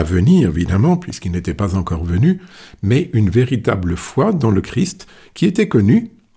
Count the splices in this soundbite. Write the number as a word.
zero